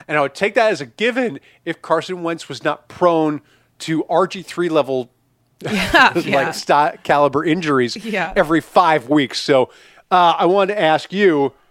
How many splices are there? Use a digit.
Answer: 0